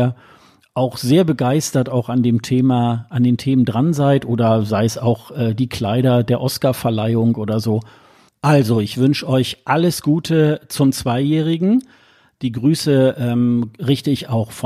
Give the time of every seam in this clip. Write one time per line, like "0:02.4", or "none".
0:08.3